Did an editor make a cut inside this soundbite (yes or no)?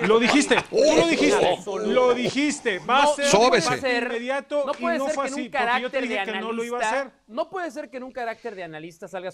no